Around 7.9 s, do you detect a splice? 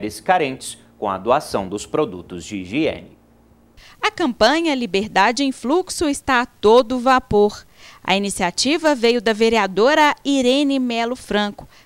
no; 0 cuts

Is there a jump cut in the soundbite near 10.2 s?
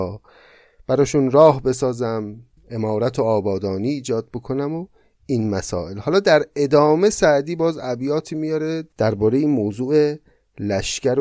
no; 0 cuts

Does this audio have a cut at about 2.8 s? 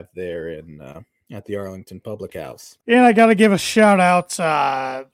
yes; 1 cut; at 2.8 s

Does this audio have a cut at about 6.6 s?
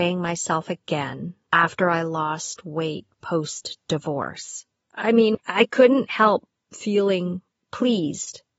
no; 1 cut; at 5.3 s

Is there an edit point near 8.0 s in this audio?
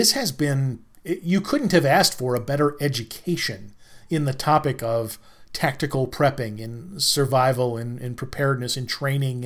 no; 0 cuts

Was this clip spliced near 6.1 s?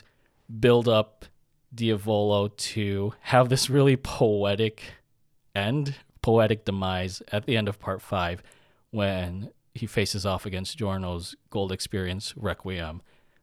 yes; 1 cut; at 6.1 s

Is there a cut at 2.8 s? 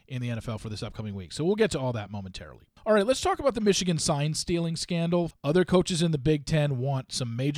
yes; 2 cuts; at 2.8 s, 5.3 s

